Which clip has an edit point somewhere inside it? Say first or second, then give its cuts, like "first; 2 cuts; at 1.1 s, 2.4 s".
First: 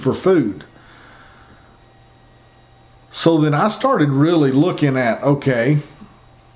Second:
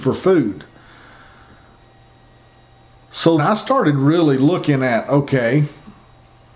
second; 1 cut; at 3.4 s